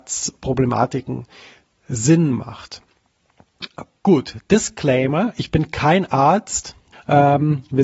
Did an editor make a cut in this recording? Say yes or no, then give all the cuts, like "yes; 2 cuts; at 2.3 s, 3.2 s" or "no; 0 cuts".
yes; 1 cut; at 6.9 s